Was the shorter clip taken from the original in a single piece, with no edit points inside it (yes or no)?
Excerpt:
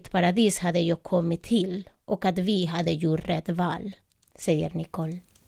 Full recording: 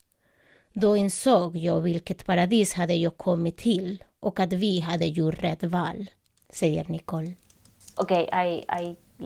yes